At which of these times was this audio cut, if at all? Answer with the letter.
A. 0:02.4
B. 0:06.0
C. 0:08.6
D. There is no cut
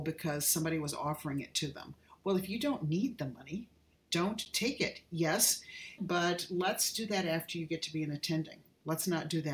B